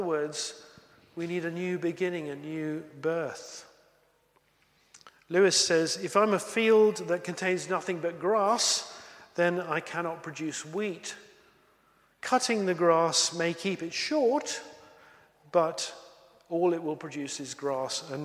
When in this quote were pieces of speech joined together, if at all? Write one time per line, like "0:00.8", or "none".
none

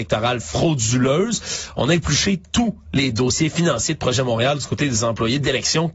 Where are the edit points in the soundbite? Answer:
none

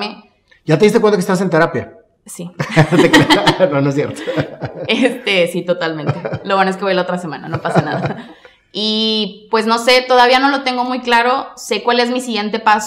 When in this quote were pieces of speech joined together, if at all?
none

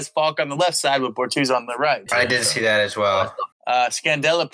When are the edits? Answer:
0:02.1
0:03.5

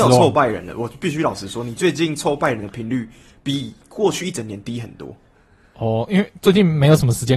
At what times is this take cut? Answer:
none

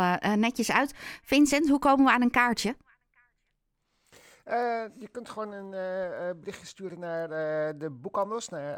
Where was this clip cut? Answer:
none

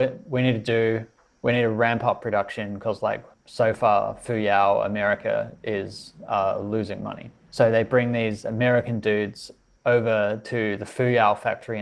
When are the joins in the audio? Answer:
none

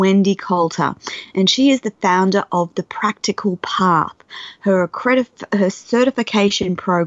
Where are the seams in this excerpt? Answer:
none

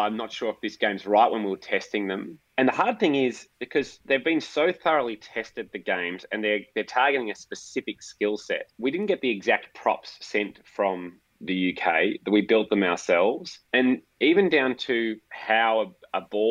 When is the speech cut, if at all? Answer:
0:08.7
0:13.7

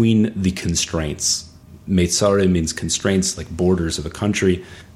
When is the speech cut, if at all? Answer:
none

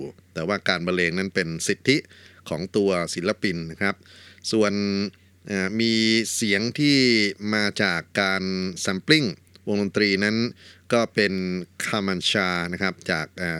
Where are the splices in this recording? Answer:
none

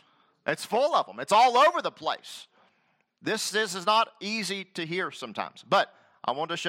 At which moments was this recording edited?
0:03.1

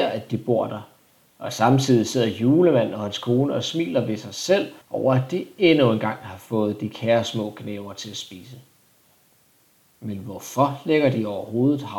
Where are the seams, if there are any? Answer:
0:01.3
0:04.8

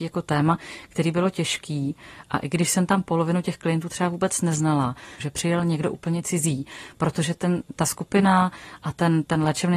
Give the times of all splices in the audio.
0:05.2

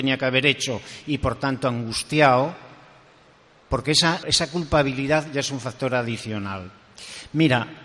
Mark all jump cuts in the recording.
0:04.2

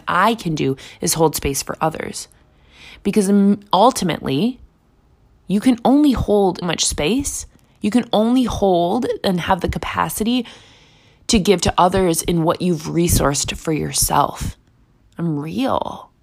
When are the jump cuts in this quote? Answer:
0:06.6
0:15.0

